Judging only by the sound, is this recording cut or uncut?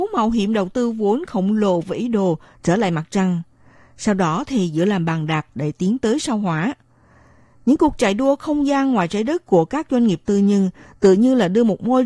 uncut